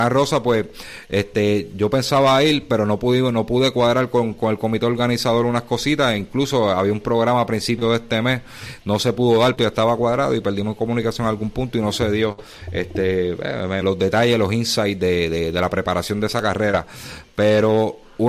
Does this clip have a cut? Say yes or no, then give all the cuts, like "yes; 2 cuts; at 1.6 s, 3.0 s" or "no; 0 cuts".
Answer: yes; 2 cuts; at 9.6 s, 13.8 s